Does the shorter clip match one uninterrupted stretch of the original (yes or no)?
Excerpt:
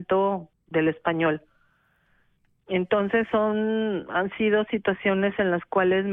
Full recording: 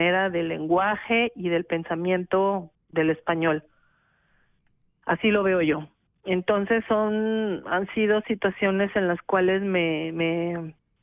no